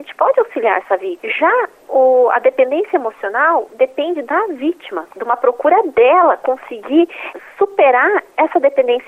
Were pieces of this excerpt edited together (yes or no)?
no